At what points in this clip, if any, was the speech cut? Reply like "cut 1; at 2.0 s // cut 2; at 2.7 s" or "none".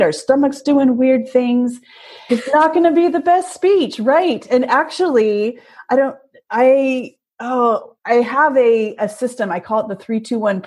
cut 1; at 2.3 s // cut 2; at 8.0 s